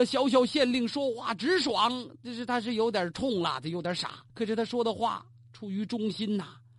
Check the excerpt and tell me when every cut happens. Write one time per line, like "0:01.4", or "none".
0:04.3